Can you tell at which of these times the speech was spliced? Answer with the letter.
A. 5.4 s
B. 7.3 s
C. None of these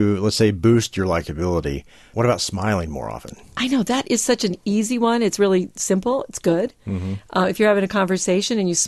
C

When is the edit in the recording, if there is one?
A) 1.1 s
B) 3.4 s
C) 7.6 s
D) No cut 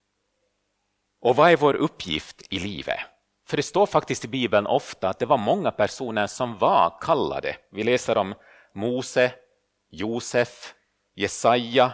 A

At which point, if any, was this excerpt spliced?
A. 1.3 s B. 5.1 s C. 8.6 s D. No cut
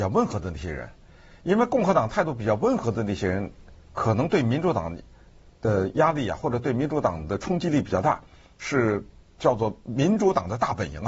C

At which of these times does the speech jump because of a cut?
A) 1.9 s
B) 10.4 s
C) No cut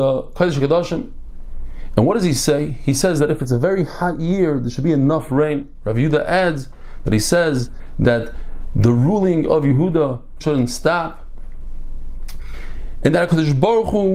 B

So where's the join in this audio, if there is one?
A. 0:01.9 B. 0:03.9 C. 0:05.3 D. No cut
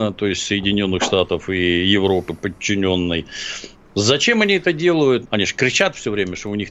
C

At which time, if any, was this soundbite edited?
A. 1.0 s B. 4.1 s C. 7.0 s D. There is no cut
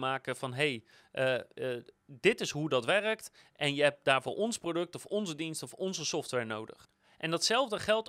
D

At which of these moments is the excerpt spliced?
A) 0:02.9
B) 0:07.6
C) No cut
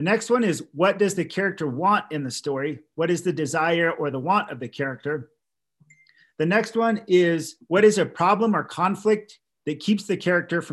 B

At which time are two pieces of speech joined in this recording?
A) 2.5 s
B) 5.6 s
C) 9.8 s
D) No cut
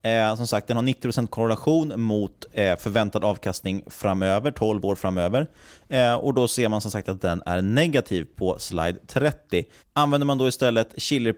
D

